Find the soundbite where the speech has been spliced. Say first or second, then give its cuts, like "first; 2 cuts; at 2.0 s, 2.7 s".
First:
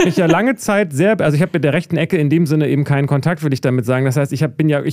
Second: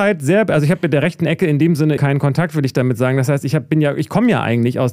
second; 1 cut; at 2.0 s